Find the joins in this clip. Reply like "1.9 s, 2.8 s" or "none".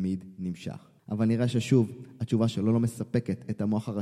1.0 s